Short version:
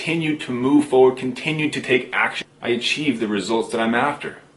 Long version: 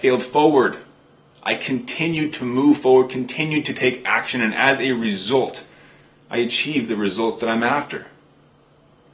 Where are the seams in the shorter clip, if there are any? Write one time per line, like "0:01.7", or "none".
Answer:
0:02.4